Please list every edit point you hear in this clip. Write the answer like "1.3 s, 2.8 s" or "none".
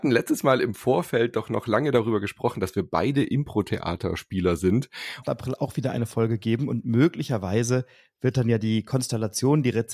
5.2 s